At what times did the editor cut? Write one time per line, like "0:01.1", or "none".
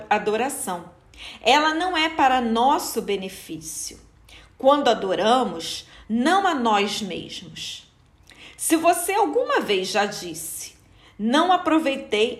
0:06.0